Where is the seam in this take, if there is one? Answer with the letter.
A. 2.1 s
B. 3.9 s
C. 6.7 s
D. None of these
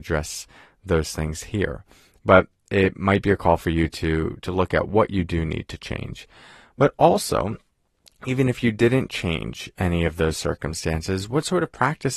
D